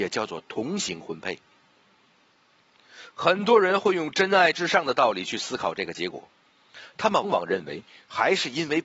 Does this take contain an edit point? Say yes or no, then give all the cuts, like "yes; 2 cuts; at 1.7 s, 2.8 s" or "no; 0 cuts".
yes; 1 cut; at 7.2 s